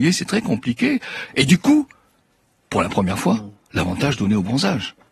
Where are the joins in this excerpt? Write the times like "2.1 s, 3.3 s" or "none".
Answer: 1.3 s